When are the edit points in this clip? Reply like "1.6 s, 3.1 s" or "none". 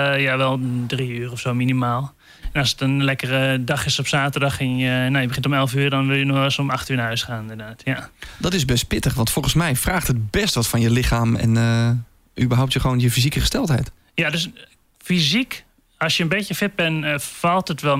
none